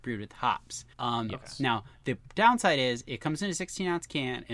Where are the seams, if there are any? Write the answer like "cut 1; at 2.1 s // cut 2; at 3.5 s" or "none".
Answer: cut 1; at 0.9 s